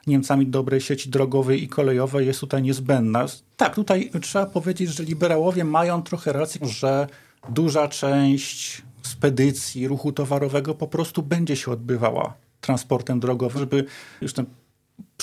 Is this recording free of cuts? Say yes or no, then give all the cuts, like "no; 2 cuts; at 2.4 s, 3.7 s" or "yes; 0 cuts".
no; 3 cuts; at 3.5 s, 6.6 s, 13.6 s